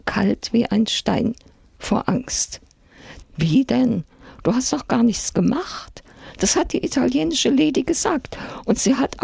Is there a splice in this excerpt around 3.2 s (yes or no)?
yes